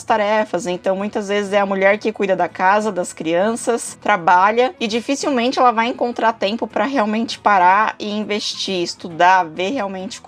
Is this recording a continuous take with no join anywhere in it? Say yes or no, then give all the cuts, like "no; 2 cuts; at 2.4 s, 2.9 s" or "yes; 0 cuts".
yes; 0 cuts